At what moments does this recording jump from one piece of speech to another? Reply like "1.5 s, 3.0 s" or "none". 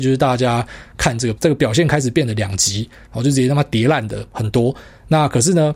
1.4 s, 3.1 s